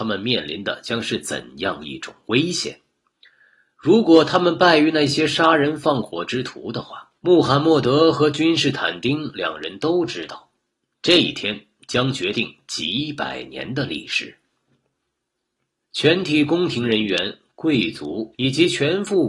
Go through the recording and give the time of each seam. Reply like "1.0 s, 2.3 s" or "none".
7.2 s, 15.8 s, 18.3 s

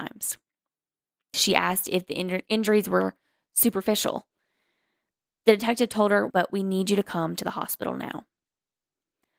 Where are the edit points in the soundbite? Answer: 1.3 s, 6.3 s

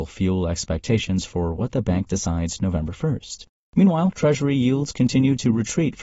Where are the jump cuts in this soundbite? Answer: none

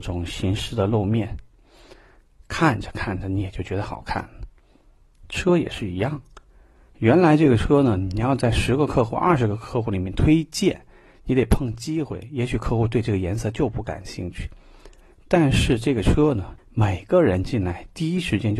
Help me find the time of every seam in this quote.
16.6 s

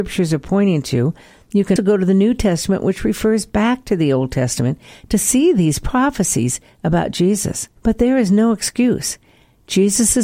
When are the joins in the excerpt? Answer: 1.8 s, 7.8 s

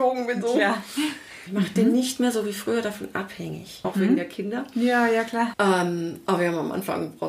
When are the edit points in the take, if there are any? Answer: 1.5 s, 3.8 s, 5.5 s

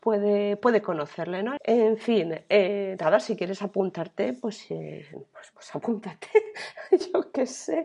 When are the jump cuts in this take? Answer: 1.6 s, 5.5 s

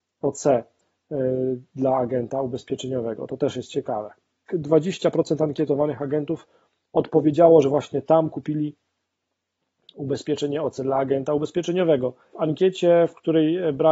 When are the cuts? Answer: 4.5 s, 12.3 s

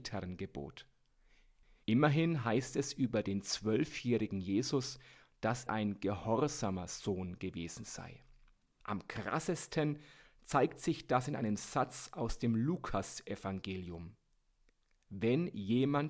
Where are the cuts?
5.7 s, 8.8 s

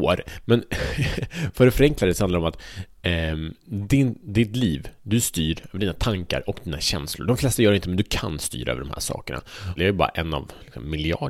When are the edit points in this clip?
9.8 s

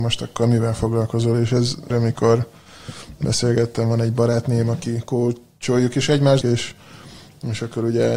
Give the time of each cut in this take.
1.9 s, 6.4 s

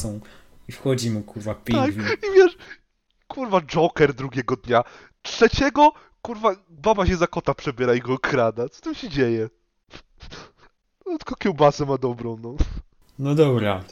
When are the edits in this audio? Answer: none

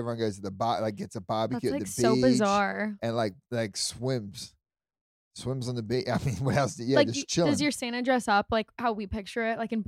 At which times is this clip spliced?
none

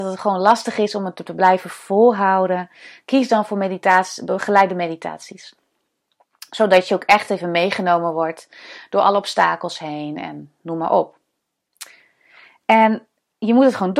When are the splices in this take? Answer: none

